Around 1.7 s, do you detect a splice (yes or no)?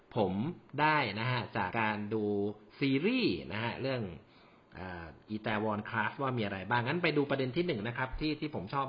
yes